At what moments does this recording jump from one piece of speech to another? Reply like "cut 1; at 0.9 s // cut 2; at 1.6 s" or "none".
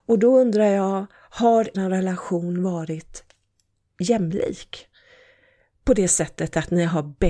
cut 1; at 1.7 s